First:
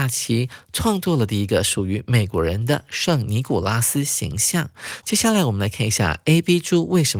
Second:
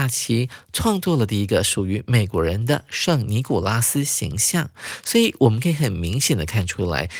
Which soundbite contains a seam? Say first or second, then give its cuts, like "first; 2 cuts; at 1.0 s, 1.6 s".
first; 1 cut; at 5.0 s